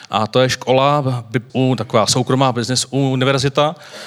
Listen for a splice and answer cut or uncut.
cut